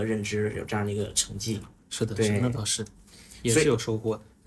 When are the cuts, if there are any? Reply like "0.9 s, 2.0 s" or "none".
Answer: none